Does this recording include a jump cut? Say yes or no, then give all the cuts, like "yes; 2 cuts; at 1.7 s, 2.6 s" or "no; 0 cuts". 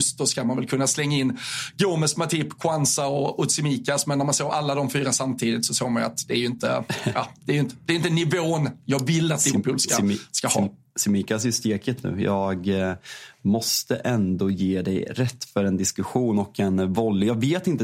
no; 0 cuts